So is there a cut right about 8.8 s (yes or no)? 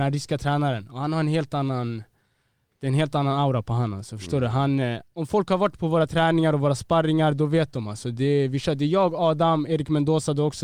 no